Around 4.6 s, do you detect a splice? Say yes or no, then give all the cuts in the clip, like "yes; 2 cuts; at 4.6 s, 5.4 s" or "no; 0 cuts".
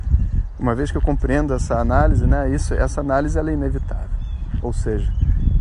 yes; 1 cut; at 4.6 s